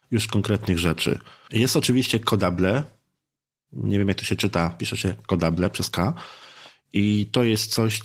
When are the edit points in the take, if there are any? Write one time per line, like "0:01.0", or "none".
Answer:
none